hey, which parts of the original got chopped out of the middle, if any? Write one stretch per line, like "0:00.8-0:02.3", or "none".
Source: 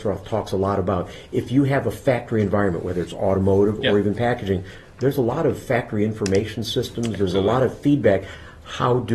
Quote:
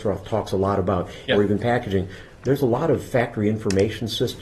0:01.3-0:03.8